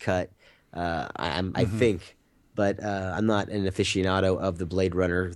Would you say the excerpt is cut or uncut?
uncut